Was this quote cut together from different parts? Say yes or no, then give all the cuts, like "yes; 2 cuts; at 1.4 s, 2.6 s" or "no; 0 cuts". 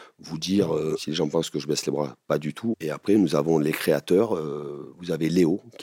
yes; 1 cut; at 2.7 s